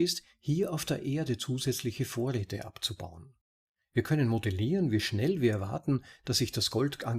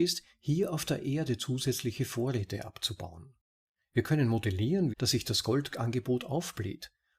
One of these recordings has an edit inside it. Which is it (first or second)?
second